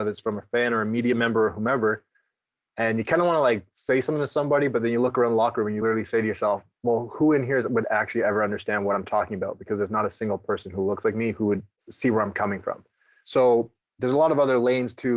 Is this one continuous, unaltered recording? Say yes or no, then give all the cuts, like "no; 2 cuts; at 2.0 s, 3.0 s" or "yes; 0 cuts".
yes; 0 cuts